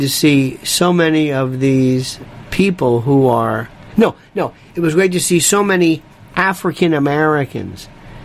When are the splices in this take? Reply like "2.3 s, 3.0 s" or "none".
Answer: none